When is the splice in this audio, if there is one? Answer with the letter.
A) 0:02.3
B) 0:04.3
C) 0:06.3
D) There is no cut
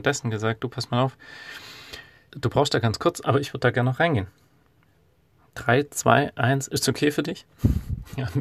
A